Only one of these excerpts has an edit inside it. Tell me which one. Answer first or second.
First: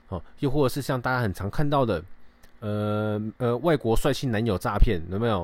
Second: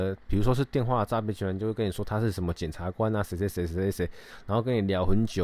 first